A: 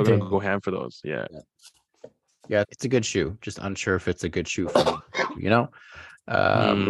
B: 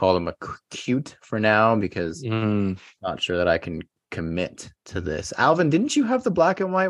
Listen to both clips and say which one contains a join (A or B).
A